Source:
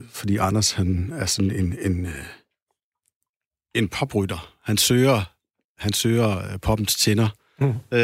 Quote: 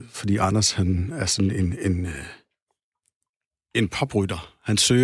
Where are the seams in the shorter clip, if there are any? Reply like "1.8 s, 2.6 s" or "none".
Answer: none